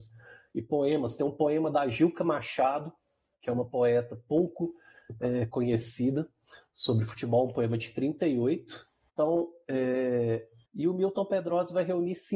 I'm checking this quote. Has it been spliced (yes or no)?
yes